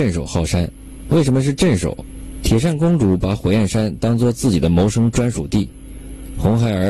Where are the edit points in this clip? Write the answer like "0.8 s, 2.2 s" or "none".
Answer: 2.4 s